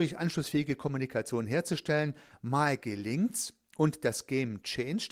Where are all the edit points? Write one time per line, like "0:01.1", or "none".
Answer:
none